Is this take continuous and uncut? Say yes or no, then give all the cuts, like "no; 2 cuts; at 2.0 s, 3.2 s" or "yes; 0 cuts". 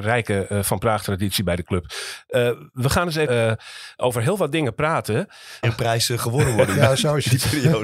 no; 2 cuts; at 3.3 s, 5.6 s